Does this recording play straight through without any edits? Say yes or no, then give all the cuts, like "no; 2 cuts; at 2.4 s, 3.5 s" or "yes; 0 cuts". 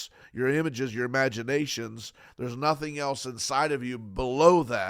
yes; 0 cuts